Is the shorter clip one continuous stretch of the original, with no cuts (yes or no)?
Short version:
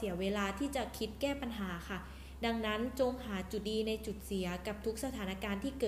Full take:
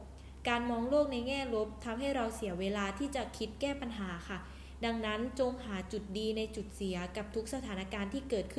no